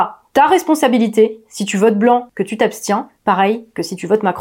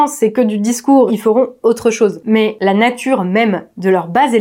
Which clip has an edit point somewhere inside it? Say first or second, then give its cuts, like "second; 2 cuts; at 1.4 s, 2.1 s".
second; 1 cut; at 1.1 s